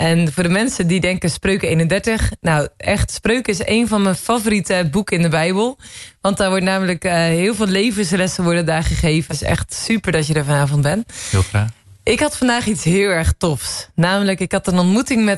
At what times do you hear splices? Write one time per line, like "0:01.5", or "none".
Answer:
0:09.3